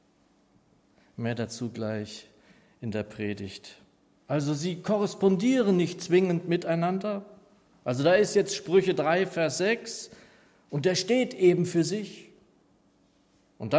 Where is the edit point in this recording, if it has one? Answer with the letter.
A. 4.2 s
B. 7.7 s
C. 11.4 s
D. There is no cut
A